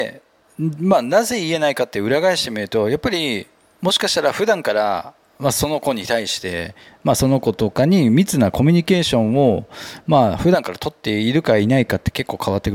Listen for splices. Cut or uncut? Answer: uncut